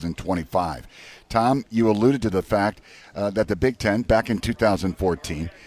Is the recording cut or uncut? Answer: uncut